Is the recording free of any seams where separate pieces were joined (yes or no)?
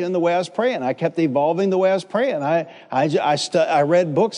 yes